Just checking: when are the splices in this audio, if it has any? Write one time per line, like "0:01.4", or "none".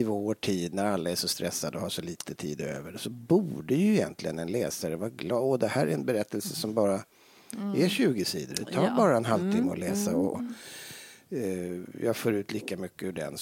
0:10.3